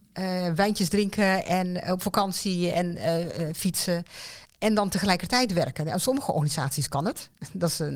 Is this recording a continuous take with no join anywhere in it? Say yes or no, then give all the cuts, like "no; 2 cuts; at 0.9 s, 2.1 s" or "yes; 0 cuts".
yes; 0 cuts